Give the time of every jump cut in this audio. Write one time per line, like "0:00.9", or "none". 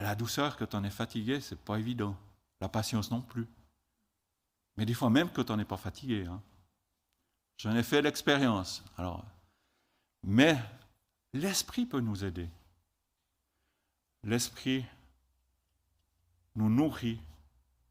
none